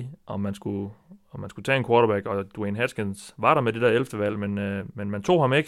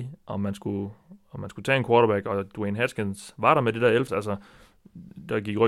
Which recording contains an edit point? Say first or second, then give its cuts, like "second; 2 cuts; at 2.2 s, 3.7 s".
second; 1 cut; at 4.1 s